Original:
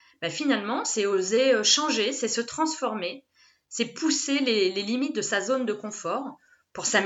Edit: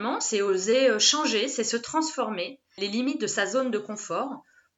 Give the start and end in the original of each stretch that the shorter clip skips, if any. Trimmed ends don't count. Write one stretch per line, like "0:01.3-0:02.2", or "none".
0:03.4-0:04.7